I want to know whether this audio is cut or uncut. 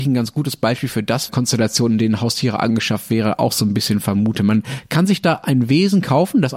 cut